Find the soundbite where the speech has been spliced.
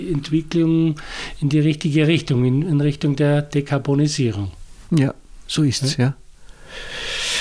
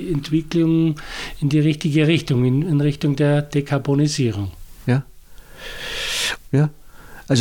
second; 2 cuts; at 4.9 s, 6.4 s

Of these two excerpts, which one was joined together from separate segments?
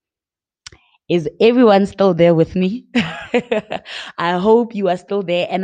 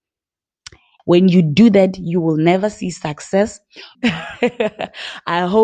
second; 2 cuts; at 1.0 s, 3.9 s

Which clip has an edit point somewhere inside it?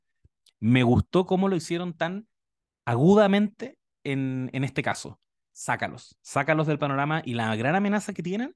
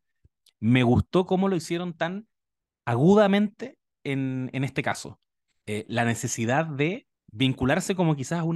second; 2 cuts; at 5.5 s, 7.2 s

